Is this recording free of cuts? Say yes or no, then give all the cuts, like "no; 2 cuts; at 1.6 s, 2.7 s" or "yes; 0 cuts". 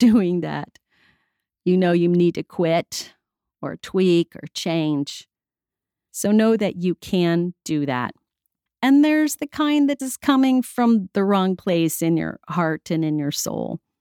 no; 3 cuts; at 6.1 s, 8.7 s, 10.0 s